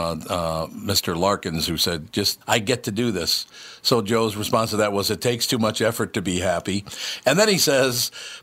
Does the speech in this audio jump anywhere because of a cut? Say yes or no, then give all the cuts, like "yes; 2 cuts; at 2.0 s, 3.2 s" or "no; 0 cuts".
yes; 1 cut; at 2.4 s